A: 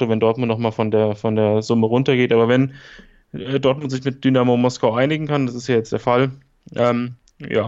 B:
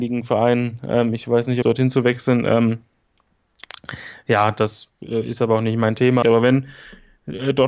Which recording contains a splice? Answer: B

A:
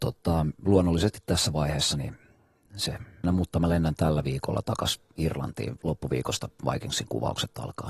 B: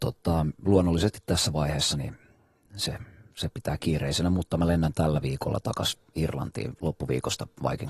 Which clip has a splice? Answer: A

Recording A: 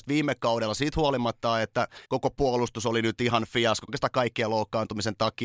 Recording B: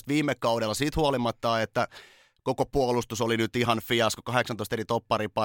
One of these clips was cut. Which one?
A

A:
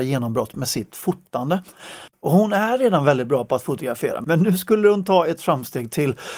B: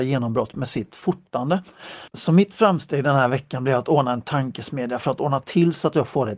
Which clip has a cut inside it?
B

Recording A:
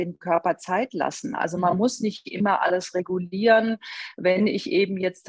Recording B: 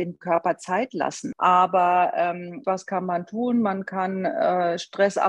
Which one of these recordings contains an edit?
B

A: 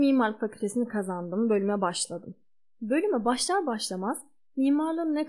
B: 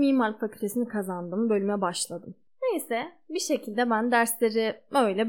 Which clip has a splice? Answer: B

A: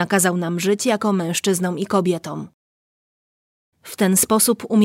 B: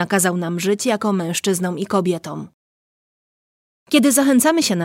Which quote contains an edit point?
A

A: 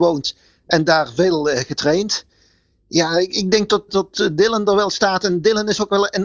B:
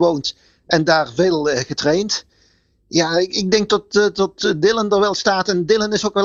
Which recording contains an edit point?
A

